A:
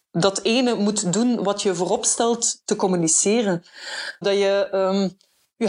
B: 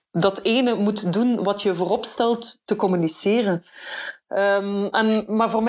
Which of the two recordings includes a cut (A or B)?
A